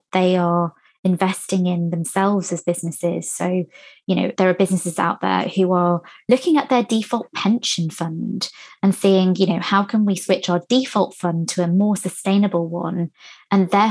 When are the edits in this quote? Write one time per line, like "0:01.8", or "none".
0:04.3